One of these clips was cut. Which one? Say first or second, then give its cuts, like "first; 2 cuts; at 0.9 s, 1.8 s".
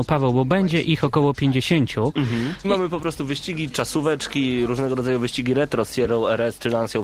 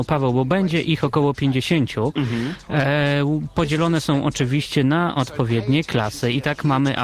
first; 1 cut; at 2.6 s